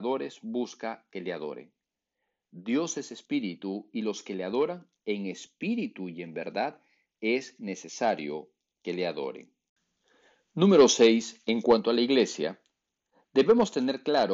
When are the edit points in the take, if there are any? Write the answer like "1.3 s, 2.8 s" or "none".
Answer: none